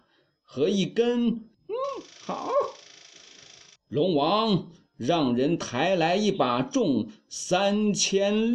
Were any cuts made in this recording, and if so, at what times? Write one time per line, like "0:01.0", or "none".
0:01.5
0:03.8

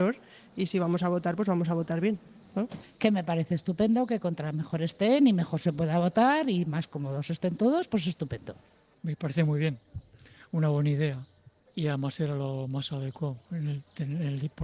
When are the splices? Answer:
none

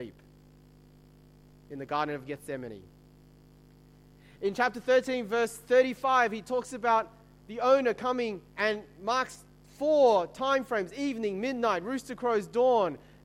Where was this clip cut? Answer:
0:08.5

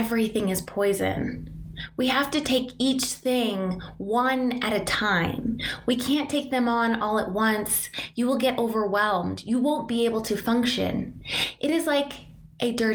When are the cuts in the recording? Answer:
none

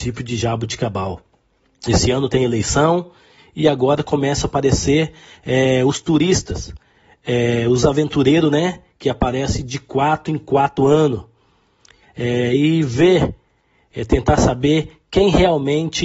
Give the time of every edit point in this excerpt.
0:12.0

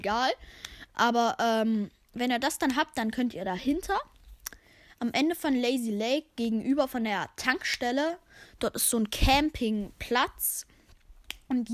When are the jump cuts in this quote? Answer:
none

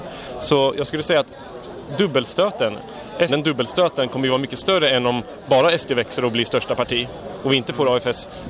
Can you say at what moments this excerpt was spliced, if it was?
0:03.3

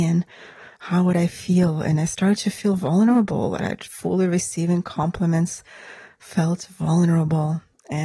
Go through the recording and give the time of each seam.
0:03.6

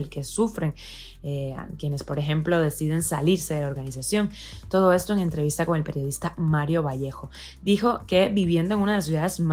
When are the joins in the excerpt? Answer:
none

